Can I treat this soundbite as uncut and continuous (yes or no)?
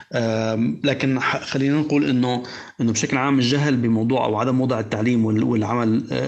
yes